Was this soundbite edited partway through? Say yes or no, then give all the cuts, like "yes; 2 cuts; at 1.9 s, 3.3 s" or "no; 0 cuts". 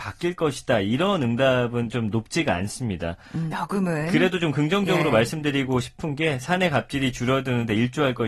yes; 1 cut; at 3.5 s